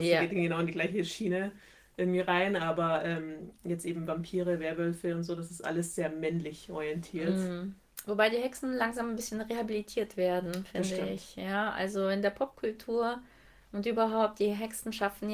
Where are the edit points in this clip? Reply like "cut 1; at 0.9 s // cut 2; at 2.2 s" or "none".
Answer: none

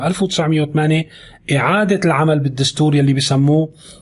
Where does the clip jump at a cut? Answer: none

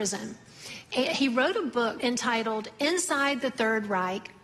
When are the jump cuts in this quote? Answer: cut 1; at 2.0 s

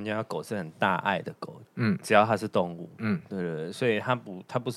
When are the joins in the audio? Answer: cut 1; at 1.6 s

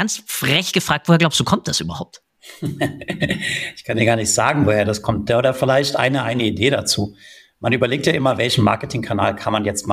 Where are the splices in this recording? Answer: none

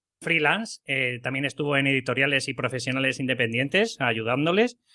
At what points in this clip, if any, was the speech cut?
none

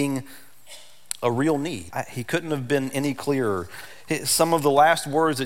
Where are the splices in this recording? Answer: cut 1; at 1.9 s

